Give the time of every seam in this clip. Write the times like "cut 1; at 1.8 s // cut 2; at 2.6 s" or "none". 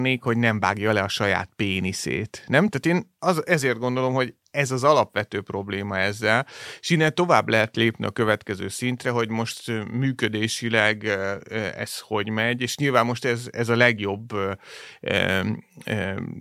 cut 1; at 2.7 s